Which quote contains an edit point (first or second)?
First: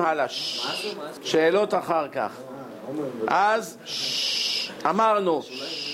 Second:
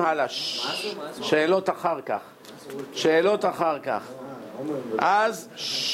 first